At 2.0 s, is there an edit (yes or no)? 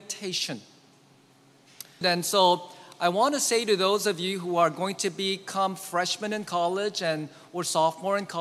yes